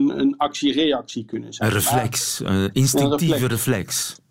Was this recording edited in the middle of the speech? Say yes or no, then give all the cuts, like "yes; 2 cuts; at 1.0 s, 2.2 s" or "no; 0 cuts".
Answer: no; 0 cuts